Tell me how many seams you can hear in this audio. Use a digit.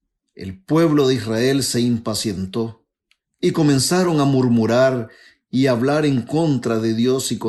0